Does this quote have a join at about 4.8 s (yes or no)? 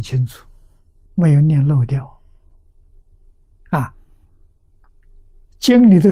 no